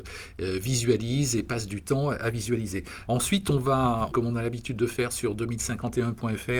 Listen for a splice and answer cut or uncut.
cut